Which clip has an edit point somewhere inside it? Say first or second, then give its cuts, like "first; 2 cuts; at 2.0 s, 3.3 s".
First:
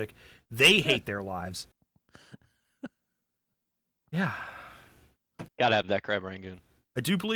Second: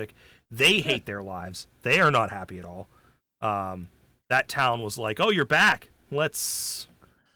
first; 2 cuts; at 1.7 s, 5.5 s